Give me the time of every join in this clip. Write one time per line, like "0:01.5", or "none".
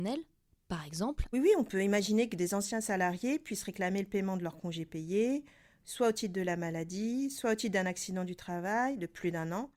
0:01.3